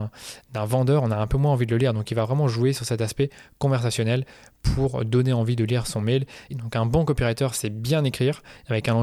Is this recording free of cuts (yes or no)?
no